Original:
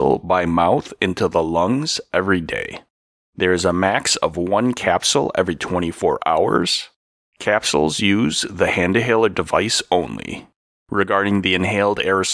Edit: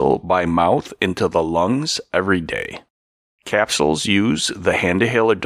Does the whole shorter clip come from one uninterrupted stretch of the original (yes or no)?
no